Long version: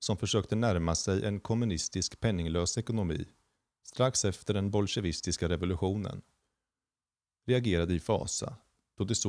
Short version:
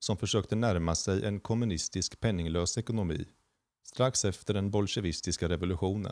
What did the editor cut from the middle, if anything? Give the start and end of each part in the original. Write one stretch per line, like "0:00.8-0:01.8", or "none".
none